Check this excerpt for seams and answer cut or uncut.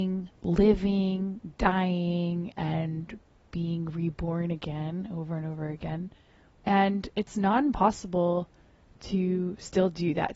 cut